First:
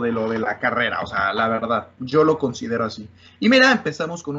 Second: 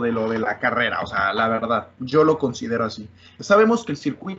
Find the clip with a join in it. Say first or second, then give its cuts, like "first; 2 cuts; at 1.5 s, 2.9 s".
second; 1 cut; at 3.4 s